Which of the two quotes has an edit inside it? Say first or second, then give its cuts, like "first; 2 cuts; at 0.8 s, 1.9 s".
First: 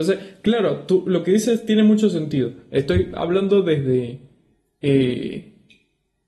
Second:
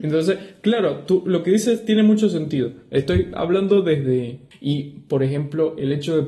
second; 1 cut; at 4.5 s